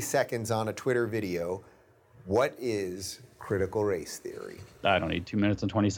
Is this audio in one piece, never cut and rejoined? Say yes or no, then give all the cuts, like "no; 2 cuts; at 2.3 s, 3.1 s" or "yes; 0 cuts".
yes; 0 cuts